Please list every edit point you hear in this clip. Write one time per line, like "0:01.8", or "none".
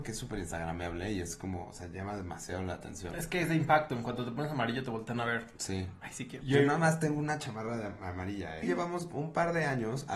0:06.4
0:08.6